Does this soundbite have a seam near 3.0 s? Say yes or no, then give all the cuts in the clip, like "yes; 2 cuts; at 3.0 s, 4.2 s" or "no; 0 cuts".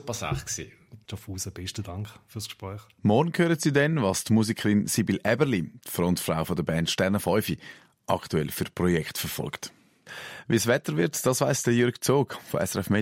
yes; 2 cuts; at 1.0 s, 3.0 s